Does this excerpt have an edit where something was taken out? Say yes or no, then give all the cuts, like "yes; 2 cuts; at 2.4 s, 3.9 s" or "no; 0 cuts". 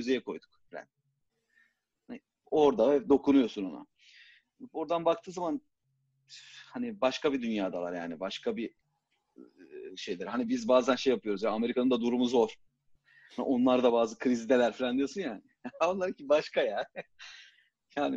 no; 0 cuts